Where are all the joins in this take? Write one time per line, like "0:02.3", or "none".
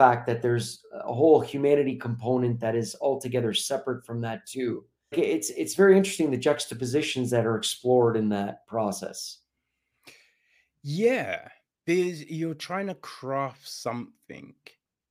0:05.1